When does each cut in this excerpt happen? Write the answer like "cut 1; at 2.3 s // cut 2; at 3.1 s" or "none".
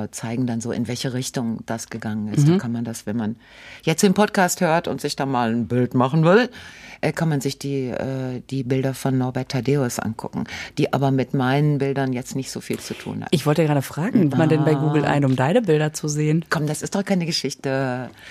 cut 1; at 14.3 s // cut 2; at 16.5 s